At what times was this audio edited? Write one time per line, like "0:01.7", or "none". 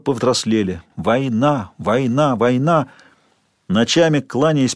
0:00.9